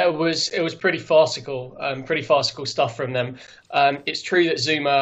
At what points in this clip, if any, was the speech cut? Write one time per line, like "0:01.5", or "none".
0:03.6